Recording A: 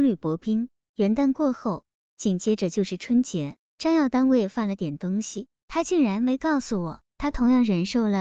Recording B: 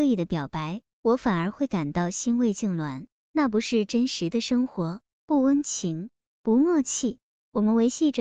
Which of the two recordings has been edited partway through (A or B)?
A